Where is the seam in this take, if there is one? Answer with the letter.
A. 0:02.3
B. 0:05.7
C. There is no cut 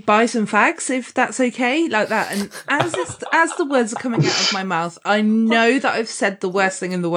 C